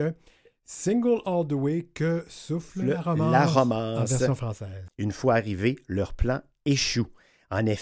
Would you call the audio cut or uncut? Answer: cut